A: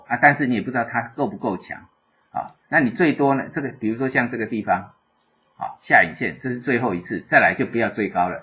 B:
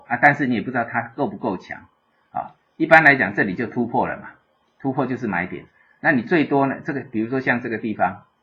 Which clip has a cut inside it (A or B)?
A